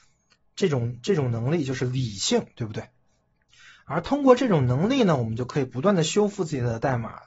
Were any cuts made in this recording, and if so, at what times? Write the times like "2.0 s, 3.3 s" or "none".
none